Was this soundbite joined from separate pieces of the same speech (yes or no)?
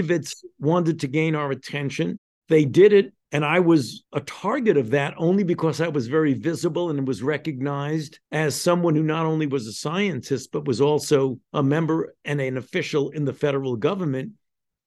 no